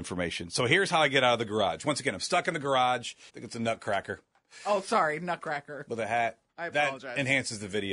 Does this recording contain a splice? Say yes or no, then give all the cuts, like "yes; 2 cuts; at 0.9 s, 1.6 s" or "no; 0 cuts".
yes; 1 cut; at 3.3 s